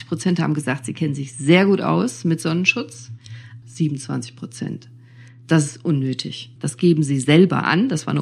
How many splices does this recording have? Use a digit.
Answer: 2